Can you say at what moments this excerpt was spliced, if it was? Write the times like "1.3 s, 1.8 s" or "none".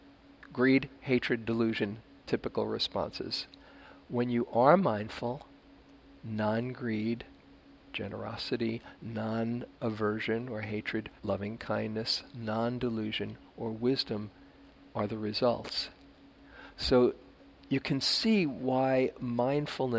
11.2 s